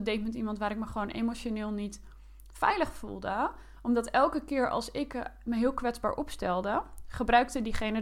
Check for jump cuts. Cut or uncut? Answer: uncut